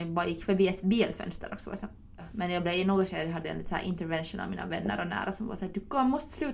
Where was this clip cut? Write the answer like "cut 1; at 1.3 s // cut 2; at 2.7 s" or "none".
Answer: none